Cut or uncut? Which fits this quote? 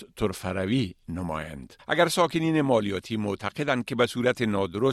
cut